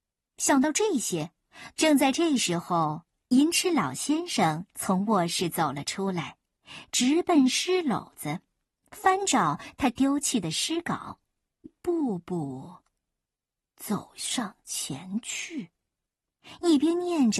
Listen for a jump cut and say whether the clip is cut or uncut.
cut